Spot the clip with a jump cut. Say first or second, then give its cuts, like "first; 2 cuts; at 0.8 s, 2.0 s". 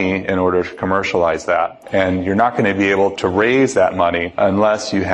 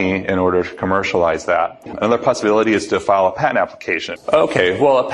second; 2 cuts; at 1.9 s, 4.2 s